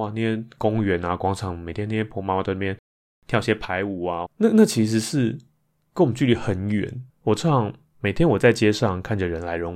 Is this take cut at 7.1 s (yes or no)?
yes